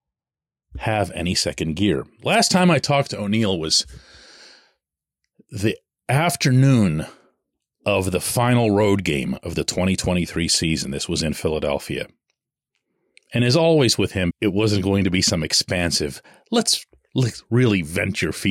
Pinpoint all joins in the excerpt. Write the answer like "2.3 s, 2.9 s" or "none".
14.3 s